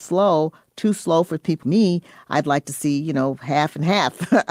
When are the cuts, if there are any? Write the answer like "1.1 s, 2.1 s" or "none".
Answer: 1.6 s